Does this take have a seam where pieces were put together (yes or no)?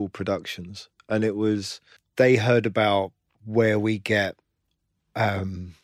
no